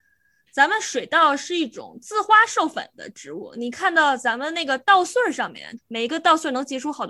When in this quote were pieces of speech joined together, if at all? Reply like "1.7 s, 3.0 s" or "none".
5.8 s

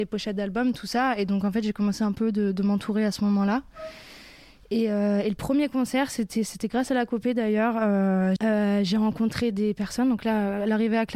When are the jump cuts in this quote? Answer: 8.4 s

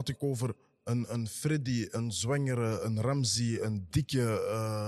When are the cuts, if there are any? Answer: none

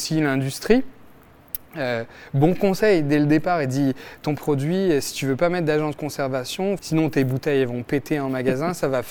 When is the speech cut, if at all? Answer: 6.8 s

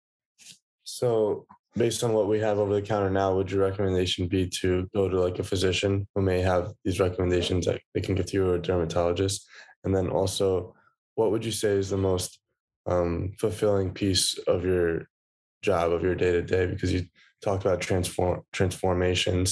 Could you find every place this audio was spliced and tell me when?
none

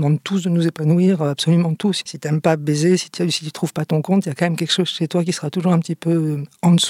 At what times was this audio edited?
2.0 s

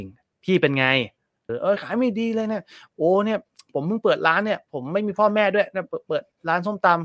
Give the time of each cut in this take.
1.5 s

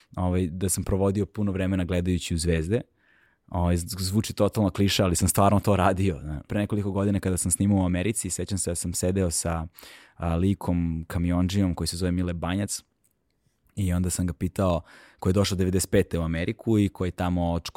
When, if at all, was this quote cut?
6.5 s

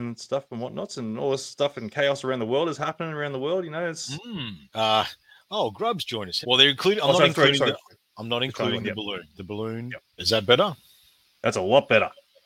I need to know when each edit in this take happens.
4.7 s, 6.4 s, 10.2 s

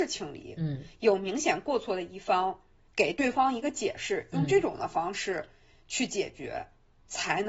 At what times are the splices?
2.9 s

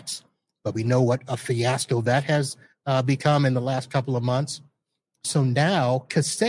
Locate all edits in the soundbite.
none

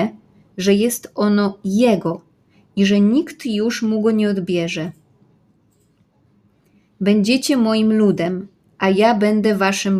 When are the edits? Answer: none

